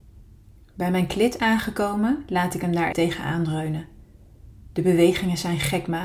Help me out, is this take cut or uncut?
cut